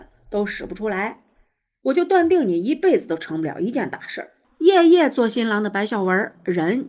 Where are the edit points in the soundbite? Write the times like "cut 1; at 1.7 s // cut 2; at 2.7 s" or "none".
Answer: cut 1; at 4.4 s